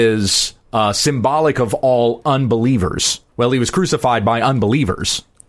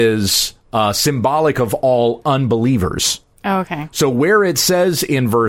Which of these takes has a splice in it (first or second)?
first